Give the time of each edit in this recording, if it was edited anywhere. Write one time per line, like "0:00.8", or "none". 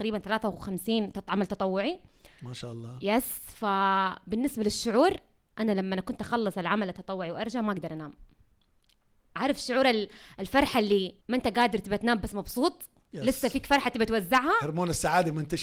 0:11.2